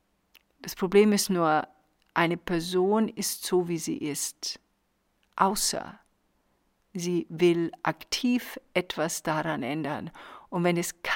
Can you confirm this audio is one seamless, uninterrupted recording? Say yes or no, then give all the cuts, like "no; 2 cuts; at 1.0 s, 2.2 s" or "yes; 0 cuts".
yes; 0 cuts